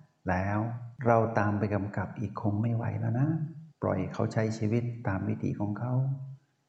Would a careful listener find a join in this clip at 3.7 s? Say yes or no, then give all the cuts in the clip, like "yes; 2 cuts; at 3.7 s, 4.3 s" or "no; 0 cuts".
yes; 2 cuts; at 1.0 s, 3.7 s